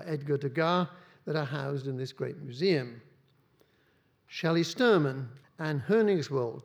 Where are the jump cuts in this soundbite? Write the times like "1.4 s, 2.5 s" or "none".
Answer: 5.4 s

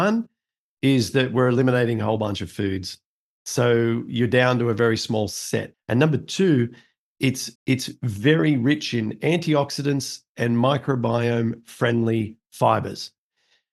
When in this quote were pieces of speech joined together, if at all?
5.7 s, 7.6 s

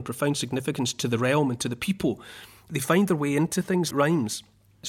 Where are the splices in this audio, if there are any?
3.9 s

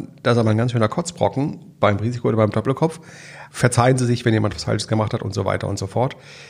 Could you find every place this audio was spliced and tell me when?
3.5 s

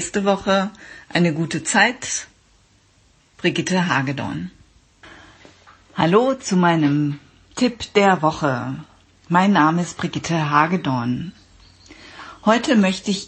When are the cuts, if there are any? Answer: none

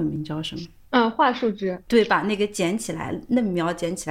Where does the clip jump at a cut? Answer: none

